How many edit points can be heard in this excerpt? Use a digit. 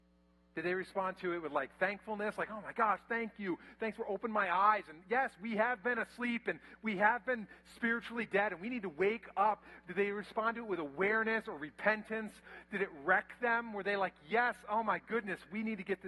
0